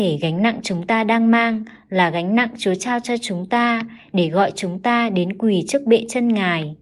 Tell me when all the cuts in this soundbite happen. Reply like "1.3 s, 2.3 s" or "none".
none